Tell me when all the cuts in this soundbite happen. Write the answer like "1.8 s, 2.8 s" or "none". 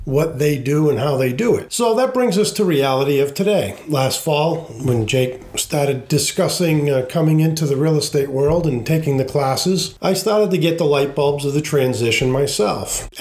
none